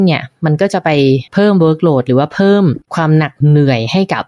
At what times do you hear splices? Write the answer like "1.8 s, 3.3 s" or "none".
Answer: 1.3 s, 2.9 s

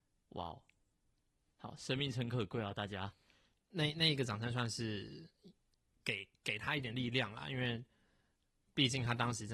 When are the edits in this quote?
none

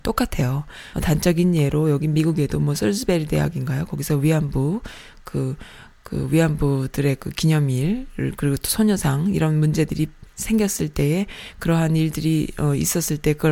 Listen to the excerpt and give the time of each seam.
0.9 s

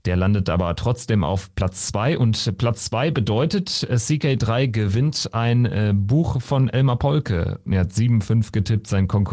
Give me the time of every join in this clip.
7.7 s

